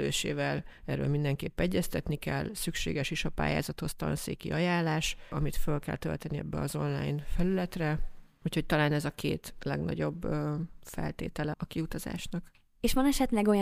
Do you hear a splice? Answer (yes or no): yes